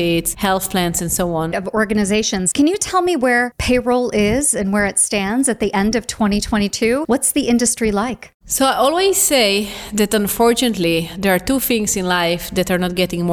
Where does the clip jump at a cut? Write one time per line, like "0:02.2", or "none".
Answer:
0:01.5

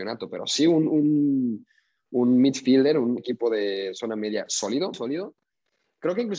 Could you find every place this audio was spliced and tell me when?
0:03.2
0:04.9

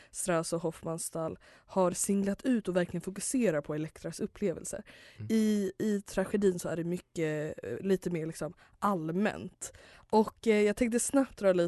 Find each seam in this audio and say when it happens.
0:09.9

